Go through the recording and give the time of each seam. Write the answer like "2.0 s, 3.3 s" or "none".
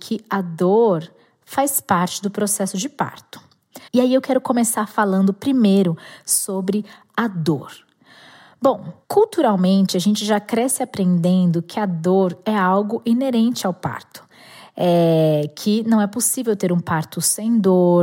3.9 s